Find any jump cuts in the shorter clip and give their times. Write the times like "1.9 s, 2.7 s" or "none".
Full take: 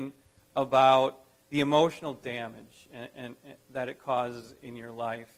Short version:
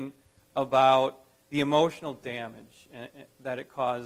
3.1 s